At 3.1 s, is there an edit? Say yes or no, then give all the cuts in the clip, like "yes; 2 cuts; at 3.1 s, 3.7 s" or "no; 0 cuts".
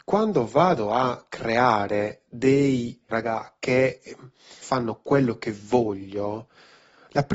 yes; 2 cuts; at 3.1 s, 4.6 s